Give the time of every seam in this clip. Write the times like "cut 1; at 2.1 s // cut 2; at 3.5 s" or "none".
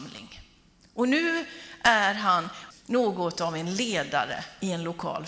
cut 1; at 2.7 s